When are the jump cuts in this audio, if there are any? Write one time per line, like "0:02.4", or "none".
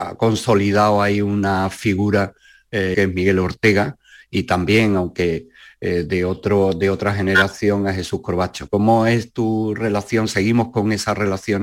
0:02.9
0:08.7